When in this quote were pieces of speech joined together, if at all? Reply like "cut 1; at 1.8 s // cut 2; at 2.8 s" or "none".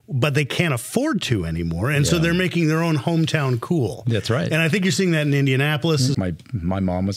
cut 1; at 6.1 s